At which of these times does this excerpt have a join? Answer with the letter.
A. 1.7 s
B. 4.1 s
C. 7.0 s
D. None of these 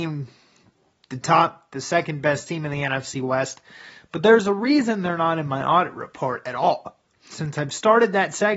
D